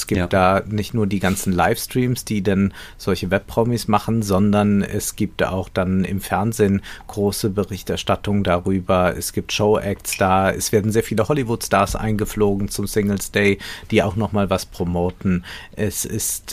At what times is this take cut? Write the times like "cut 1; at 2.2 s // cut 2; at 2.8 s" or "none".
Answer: none